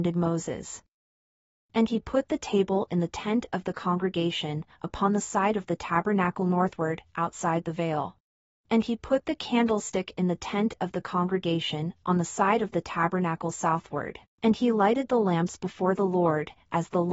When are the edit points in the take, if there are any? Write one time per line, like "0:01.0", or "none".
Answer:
0:08.6
0:12.0
0:14.3

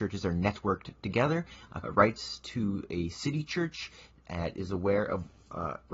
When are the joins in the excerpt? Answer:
0:01.8

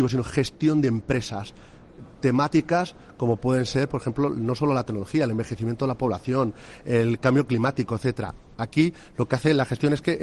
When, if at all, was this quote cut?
0:06.8
0:08.5

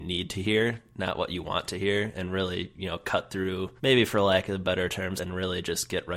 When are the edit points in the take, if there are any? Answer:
0:03.8
0:05.2

